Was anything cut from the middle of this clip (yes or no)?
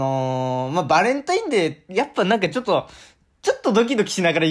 no